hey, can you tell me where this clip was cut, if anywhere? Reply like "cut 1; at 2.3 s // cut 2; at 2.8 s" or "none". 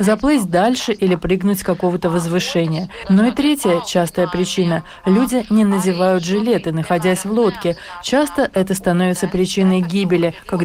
none